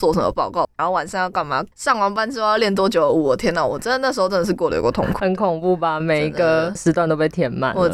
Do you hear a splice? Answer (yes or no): no